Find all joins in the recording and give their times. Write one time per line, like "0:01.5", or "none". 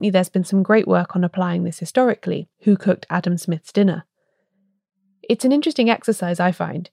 0:02.5